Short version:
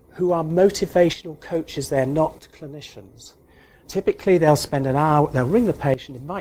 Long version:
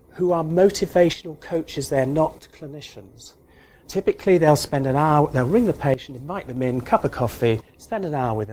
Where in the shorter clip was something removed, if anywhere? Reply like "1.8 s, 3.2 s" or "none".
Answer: none